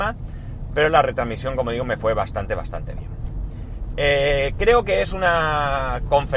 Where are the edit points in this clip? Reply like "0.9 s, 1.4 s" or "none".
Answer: none